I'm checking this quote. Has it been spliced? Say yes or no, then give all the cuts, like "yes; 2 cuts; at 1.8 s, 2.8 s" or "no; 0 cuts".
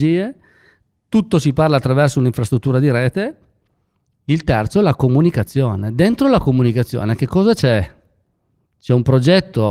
no; 0 cuts